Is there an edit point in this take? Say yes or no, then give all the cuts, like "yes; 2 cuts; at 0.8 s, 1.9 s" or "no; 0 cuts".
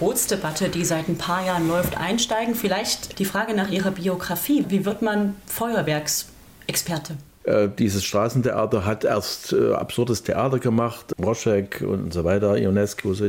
yes; 2 cuts; at 4.6 s, 7.4 s